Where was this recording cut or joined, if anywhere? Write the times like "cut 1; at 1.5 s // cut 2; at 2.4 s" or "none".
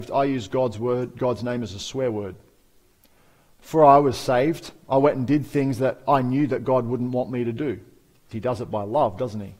cut 1; at 8.3 s